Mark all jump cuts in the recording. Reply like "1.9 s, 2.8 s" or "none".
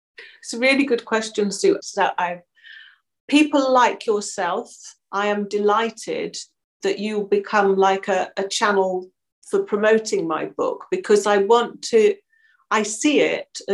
1.8 s

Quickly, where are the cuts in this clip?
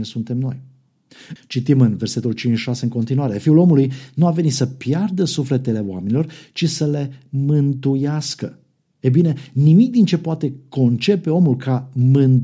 1.4 s

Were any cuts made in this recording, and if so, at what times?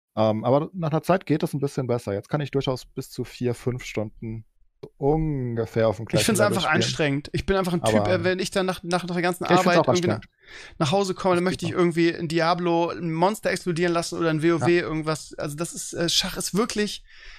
none

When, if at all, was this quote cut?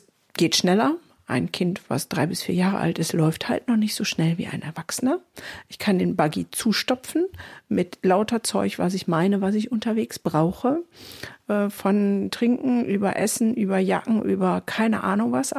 none

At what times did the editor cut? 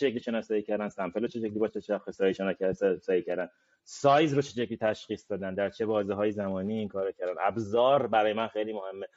none

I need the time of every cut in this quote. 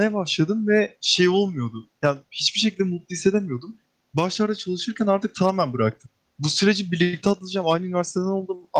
6.3 s

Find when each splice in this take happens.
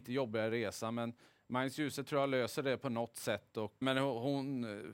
3.8 s

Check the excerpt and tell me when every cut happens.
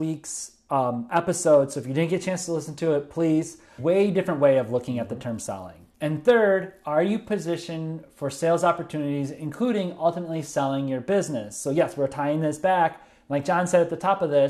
3.8 s, 5.9 s

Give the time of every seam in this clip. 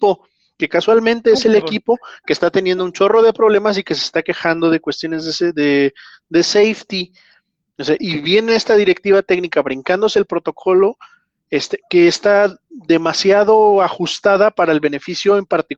8.0 s, 11.8 s

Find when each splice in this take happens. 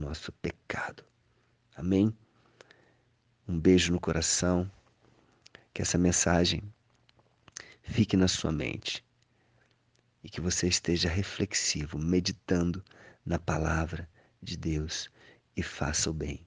none

